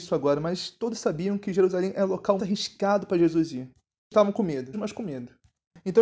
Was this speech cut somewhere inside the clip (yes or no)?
yes